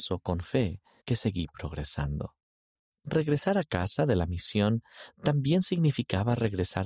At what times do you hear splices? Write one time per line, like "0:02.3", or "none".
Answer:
0:01.0
0:02.9